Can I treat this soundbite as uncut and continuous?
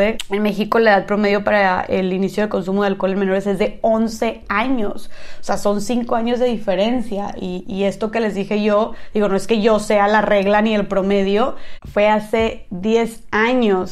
yes; 0 cuts

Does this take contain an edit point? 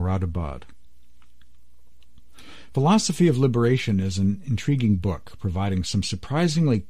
no; 0 cuts

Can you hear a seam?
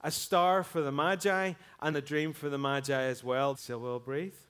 yes; 2 cuts; at 1.9 s, 3.5 s

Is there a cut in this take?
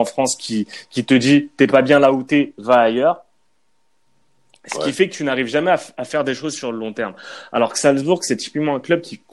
no; 0 cuts

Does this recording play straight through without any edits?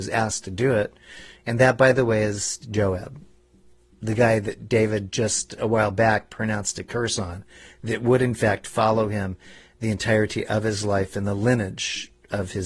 yes; 0 cuts

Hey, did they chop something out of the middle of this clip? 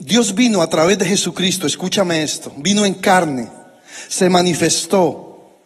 no; 0 cuts

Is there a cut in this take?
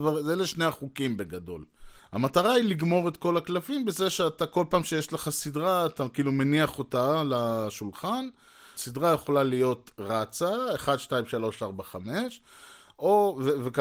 yes; 2 cuts; at 2.0 s, 8.7 s

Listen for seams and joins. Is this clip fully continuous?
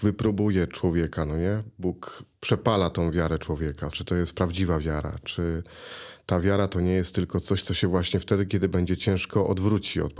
no; 1 cut; at 3.9 s

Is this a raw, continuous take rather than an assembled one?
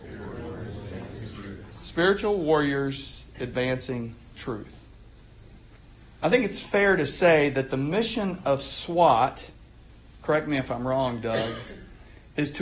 yes; 0 cuts

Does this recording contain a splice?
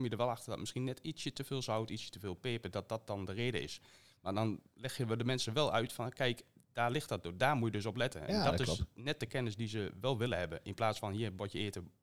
no; 0 cuts

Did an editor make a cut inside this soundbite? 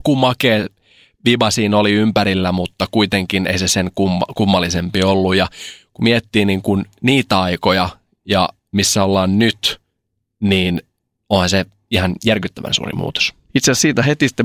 yes; 1 cut; at 13.5 s

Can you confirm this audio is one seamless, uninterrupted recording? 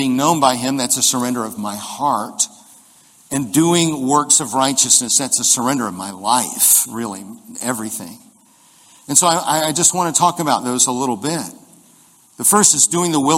yes; 0 cuts

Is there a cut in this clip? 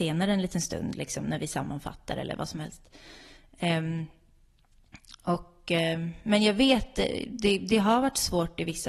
no; 0 cuts

